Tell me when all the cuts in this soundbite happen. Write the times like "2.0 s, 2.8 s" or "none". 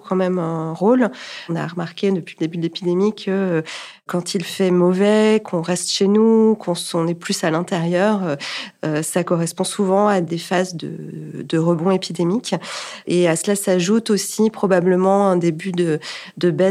none